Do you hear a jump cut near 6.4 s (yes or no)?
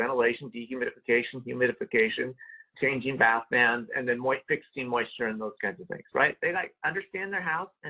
yes